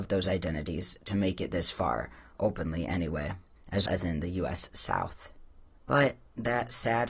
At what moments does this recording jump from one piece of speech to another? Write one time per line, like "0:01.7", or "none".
0:03.9
0:05.8